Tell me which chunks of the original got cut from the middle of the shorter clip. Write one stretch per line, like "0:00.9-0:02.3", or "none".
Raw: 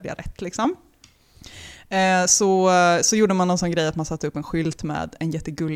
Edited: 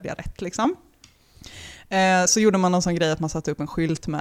0:02.3-0:03.0

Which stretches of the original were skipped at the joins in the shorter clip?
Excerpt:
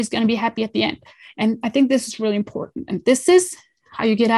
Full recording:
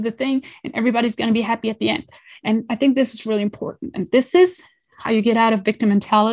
none

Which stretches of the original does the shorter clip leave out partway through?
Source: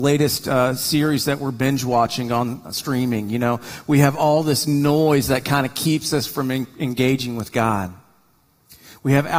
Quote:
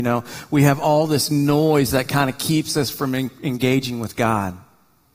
none

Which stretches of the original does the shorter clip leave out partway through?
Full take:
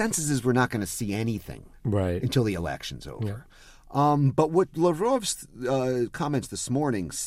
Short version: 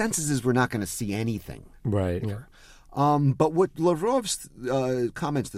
0:02.2-0:03.2

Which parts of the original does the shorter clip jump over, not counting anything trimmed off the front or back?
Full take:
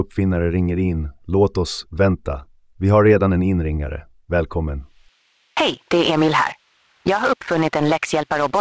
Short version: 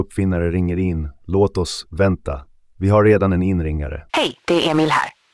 0:04.1-0:05.5

